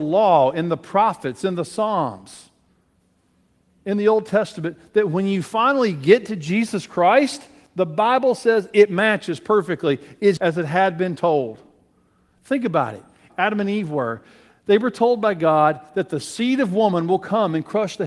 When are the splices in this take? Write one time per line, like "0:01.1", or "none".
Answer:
0:10.4
0:13.3